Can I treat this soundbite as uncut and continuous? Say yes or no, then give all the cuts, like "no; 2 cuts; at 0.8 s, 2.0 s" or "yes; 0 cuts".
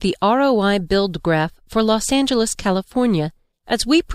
yes; 0 cuts